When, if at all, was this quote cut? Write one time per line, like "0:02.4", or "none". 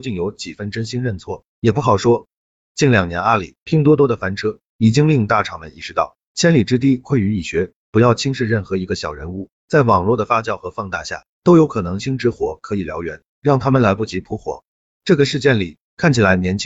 0:12.0
0:14.8